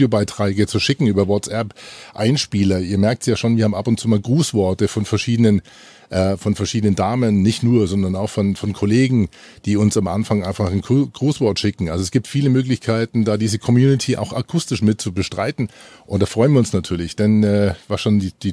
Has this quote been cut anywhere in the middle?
no; 0 cuts

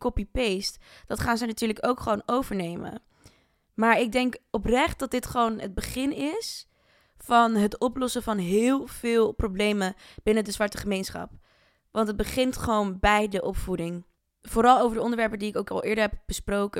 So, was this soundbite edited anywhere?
no; 0 cuts

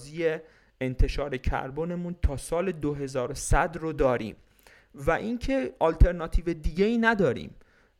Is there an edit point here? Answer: no; 0 cuts

